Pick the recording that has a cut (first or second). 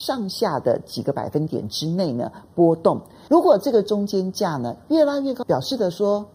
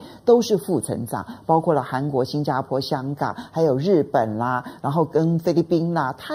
first